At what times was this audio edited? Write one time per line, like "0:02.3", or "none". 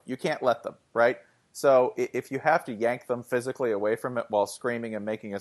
none